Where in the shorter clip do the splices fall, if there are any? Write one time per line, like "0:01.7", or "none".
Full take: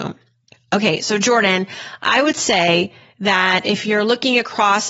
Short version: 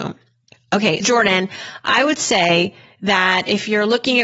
0:01.0